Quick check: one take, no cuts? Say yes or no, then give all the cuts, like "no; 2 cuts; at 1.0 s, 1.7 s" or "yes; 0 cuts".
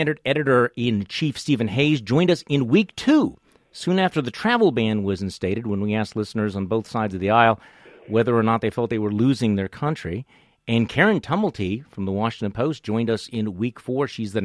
yes; 0 cuts